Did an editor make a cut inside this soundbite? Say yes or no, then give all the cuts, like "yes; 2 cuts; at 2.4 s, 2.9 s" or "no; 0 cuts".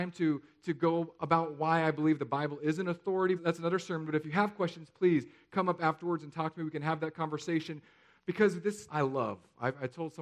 yes; 2 cuts; at 3.4 s, 8.9 s